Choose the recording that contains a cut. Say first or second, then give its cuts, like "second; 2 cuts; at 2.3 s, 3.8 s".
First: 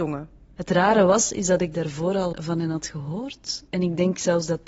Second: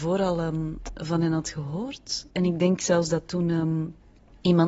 first; 1 cut; at 2.3 s